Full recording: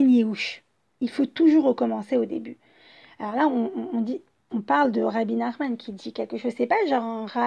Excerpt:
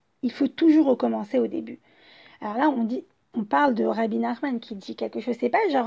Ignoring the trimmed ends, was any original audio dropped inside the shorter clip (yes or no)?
yes